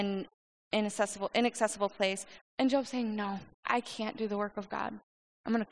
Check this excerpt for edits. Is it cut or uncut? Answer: cut